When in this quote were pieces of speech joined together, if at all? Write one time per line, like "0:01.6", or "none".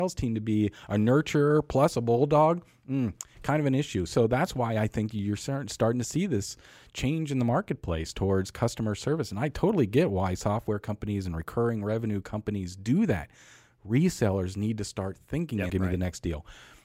0:15.7